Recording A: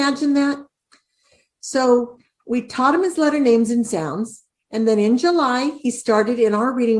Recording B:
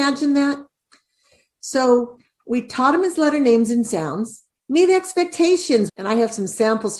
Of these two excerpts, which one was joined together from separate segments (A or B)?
B